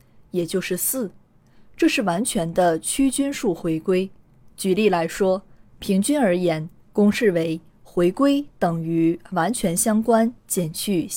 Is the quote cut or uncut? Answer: cut